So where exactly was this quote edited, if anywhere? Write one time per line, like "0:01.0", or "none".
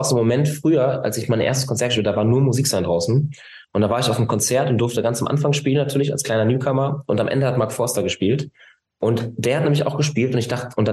none